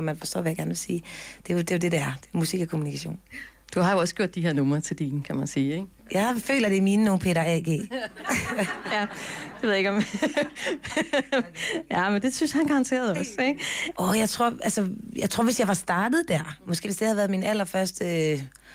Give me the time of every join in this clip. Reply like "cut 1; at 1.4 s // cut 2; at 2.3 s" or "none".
cut 1; at 13.9 s // cut 2; at 16.8 s